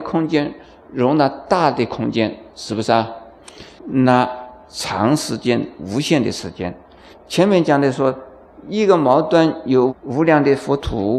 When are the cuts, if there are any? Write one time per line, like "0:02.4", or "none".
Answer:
0:03.8